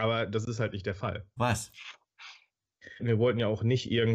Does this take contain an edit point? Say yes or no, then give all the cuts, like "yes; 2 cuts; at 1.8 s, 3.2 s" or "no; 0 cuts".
yes; 2 cuts; at 1.4 s, 3.0 s